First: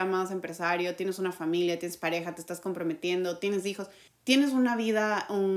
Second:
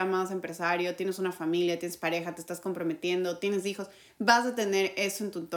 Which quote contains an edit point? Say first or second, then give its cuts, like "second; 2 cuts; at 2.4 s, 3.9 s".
first; 1 cut; at 4.1 s